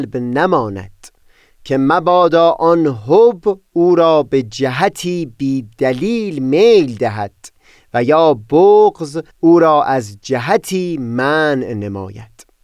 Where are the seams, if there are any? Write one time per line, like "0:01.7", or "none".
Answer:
0:09.3

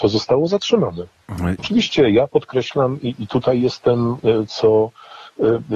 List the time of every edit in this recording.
0:01.6
0:04.5

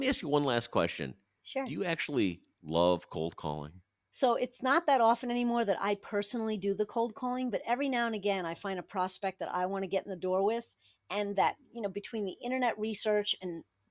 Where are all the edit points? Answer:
0:04.1

